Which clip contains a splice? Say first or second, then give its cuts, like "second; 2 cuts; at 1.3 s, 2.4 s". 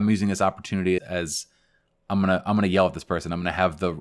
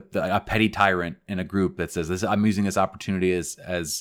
first; 1 cut; at 1.0 s